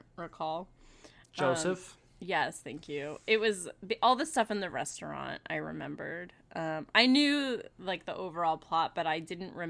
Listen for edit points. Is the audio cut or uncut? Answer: uncut